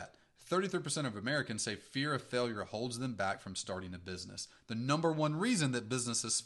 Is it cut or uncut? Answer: uncut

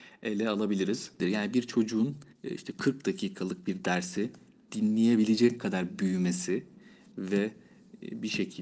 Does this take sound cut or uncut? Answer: cut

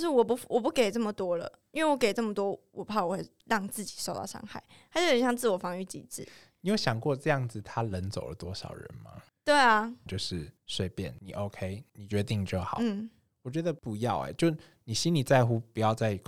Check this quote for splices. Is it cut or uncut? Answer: cut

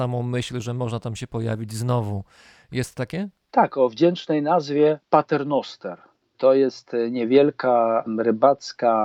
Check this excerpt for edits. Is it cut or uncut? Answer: uncut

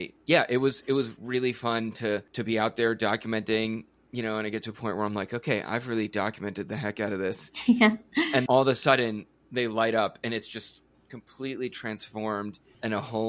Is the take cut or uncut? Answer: cut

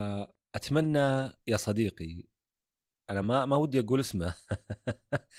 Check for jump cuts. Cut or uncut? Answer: uncut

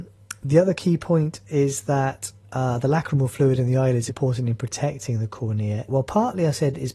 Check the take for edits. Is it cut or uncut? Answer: cut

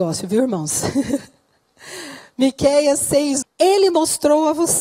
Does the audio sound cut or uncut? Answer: cut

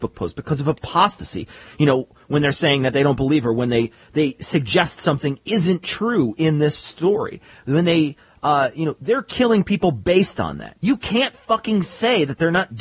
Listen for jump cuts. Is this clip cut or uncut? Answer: uncut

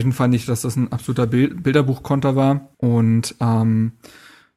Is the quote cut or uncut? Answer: cut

